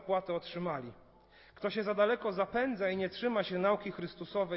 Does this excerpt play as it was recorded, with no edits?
yes; 0 cuts

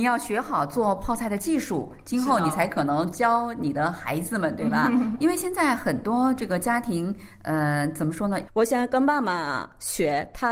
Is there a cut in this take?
yes; 2 cuts; at 5.2 s, 8.5 s

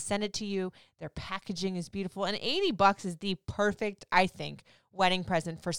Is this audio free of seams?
yes; 0 cuts

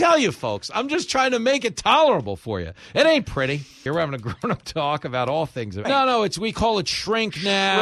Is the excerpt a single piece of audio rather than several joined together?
no; 2 cuts; at 3.9 s, 5.8 s

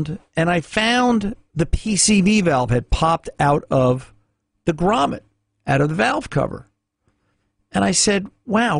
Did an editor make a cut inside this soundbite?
no; 0 cuts

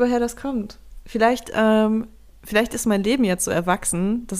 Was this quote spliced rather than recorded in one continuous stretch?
no; 0 cuts

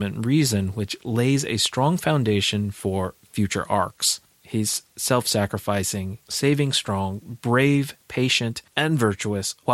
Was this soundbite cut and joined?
yes; 2 cuts; at 4.3 s, 8.0 s

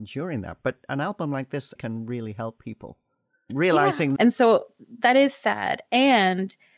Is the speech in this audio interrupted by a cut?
yes; 2 cuts; at 1.8 s, 4.2 s

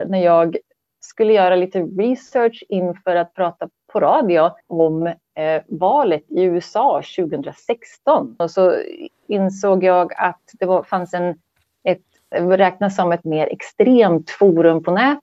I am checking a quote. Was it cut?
yes; 2 cuts; at 4.6 s, 12.3 s

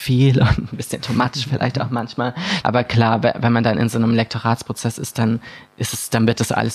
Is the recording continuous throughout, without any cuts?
no; 1 cut; at 2.6 s

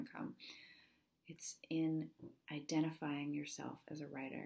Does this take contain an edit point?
no; 0 cuts

